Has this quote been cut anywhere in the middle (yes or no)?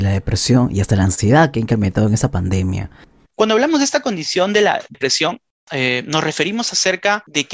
yes